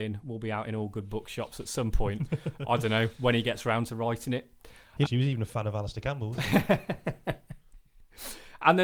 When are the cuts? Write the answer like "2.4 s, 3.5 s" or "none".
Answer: 5.0 s